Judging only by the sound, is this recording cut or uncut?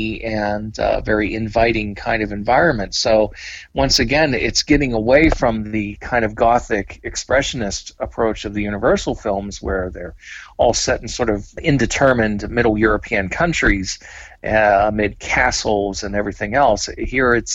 uncut